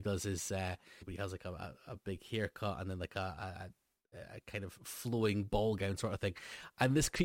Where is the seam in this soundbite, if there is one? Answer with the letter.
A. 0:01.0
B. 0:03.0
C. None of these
A